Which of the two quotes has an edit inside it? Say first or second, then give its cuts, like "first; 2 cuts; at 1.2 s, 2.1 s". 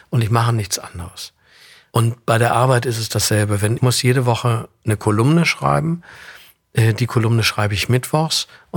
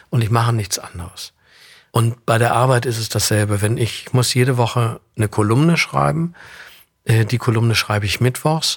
first; 1 cut; at 3.8 s